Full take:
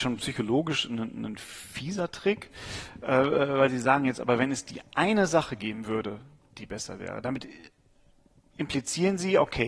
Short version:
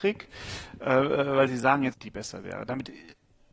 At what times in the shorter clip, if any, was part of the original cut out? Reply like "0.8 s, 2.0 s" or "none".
1.9 s